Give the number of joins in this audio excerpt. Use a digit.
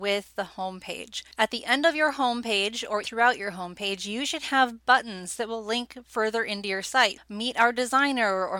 3